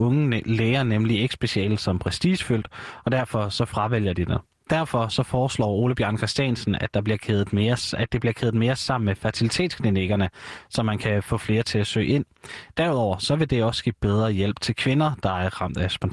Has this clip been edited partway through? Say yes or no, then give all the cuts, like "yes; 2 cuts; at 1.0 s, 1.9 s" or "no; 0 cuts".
no; 0 cuts